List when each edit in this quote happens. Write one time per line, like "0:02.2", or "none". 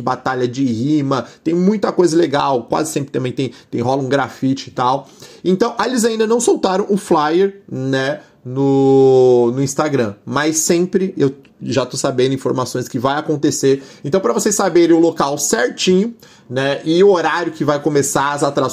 none

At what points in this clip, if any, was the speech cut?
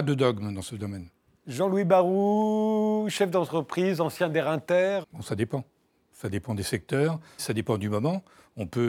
0:05.0
0:07.4

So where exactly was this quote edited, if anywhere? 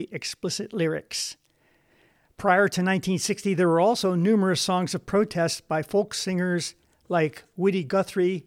none

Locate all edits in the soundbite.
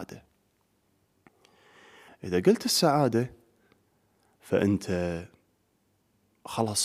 0:02.1

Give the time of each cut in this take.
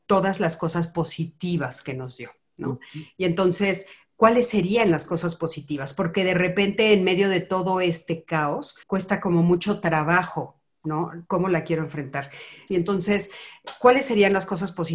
0:08.8
0:11.3
0:12.7

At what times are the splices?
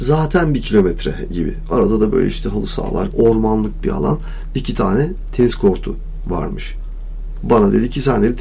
0:03.1

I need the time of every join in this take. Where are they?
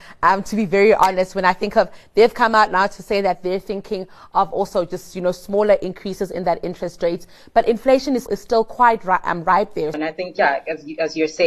0:08.3
0:09.9

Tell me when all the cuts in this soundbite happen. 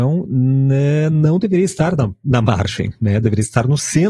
none

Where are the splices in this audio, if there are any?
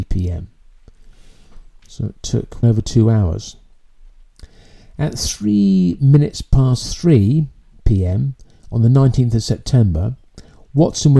0:02.6

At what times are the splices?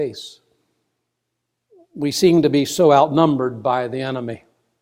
none

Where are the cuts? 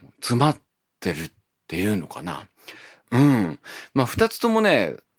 0:03.0

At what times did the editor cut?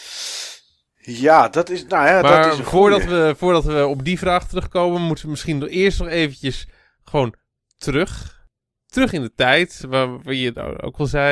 none

